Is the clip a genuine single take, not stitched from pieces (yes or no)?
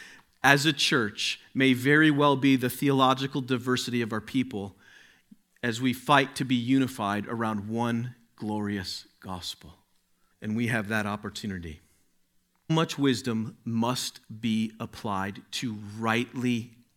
no